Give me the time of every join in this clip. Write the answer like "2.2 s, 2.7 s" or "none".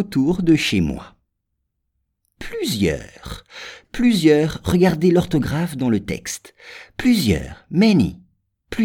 none